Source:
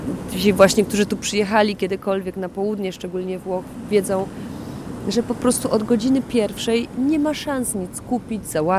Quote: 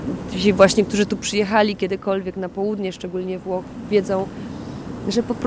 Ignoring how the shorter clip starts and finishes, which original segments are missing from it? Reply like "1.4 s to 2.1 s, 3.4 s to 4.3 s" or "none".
none